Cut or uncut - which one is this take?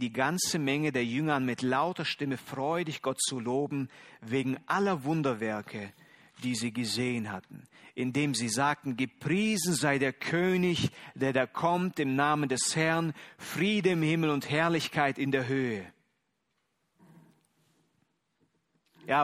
uncut